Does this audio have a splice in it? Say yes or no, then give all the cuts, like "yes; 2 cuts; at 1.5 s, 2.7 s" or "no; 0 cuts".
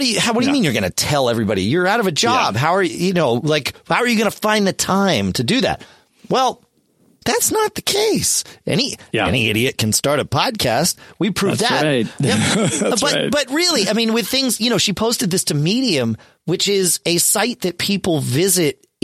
yes; 1 cut; at 7.2 s